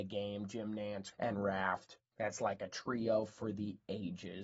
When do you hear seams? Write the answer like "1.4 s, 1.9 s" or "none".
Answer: 1.1 s